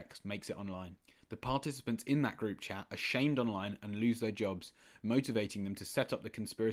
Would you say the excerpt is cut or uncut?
uncut